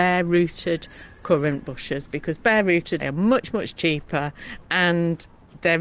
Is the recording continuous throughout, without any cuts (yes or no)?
no